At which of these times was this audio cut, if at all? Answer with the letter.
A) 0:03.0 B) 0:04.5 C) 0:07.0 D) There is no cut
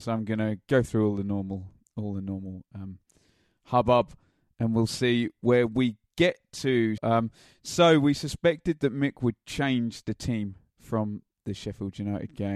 C